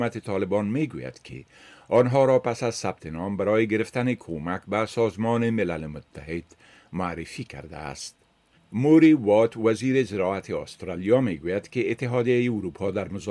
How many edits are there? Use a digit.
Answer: 1